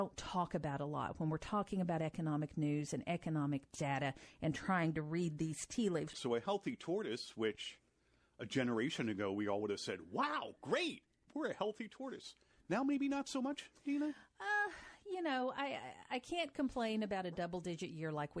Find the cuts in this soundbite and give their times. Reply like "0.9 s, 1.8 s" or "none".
6.1 s

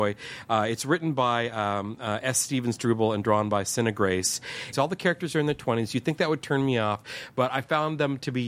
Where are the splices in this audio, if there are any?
4.7 s

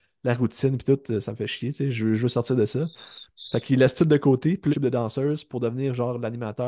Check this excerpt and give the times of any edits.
4.7 s

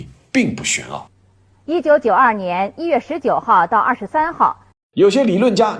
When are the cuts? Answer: 4.7 s

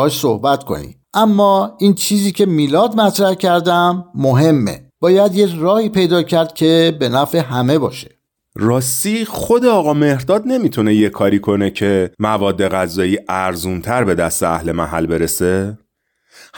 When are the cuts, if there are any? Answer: 1.0 s, 4.9 s, 12.1 s

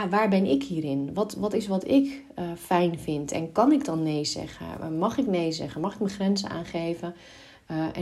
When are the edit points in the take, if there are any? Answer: none

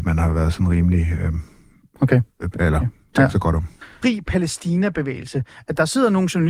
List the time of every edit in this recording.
2.5 s, 4.0 s

